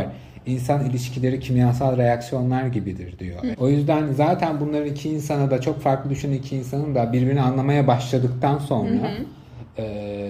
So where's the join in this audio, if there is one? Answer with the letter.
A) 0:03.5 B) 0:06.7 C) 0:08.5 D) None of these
A